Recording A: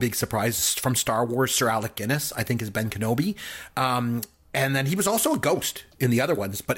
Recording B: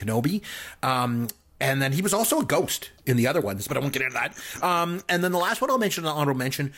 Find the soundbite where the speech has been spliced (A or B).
B